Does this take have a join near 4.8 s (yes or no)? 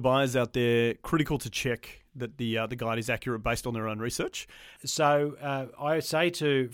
yes